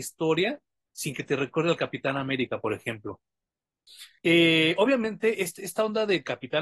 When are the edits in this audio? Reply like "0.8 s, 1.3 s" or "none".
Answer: 4.2 s